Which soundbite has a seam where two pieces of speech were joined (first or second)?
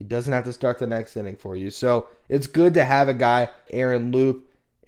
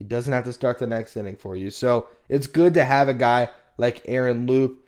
first